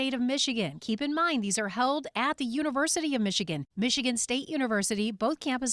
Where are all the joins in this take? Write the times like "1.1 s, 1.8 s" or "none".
3.7 s